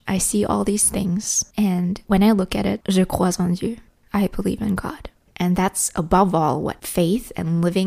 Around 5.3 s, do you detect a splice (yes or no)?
yes